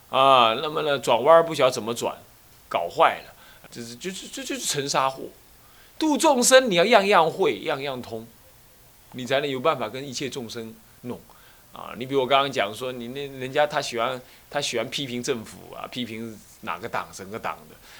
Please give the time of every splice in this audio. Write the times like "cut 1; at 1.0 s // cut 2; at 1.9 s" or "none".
cut 1; at 3.6 s